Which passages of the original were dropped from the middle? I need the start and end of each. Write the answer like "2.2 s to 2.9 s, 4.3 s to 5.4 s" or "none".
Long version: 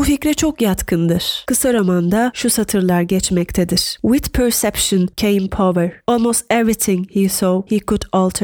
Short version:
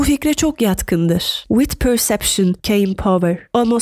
1.4 s to 4.0 s